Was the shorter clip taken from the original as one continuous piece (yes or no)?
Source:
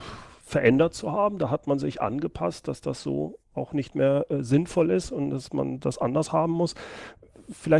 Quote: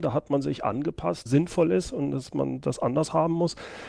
no